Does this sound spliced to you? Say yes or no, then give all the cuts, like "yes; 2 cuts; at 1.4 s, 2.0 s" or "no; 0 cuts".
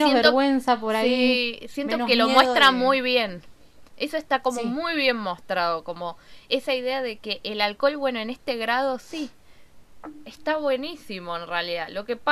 no; 0 cuts